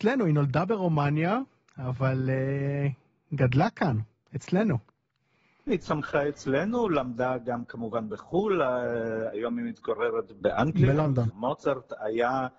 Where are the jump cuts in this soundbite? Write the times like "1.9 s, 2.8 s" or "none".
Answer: 11.3 s